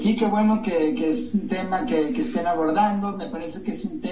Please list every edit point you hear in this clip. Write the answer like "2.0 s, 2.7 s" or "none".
none